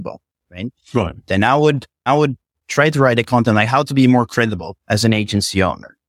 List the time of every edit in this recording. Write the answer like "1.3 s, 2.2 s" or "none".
2.1 s